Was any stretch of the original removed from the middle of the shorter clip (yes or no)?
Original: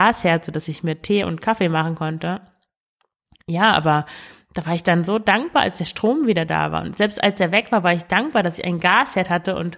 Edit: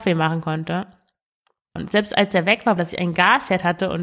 yes